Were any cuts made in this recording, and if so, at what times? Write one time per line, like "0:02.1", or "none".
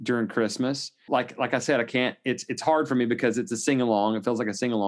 0:01.1